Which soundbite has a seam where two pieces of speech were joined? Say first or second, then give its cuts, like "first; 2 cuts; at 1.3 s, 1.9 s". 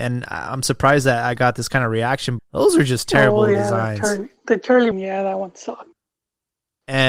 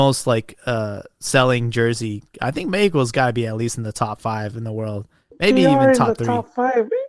first; 2 cuts; at 2.4 s, 4.9 s